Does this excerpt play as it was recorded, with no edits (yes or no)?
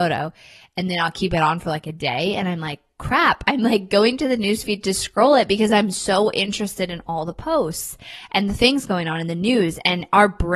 yes